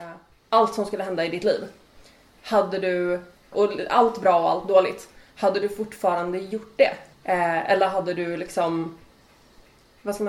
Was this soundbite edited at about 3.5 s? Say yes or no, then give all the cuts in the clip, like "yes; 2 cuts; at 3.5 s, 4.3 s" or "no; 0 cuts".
yes; 2 cuts; at 3.5 s, 7.1 s